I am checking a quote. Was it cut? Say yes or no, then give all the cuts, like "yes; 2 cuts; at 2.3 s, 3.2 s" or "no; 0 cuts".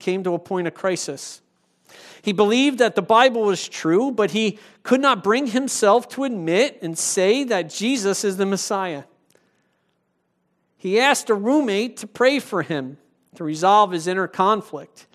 no; 0 cuts